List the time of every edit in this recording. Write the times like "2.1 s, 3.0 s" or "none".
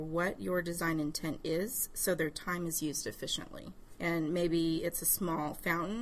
4.0 s